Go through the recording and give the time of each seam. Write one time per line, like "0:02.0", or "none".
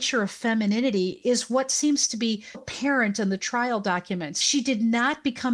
0:02.5